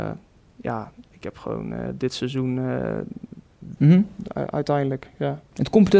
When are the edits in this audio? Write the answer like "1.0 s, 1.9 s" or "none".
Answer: 3.8 s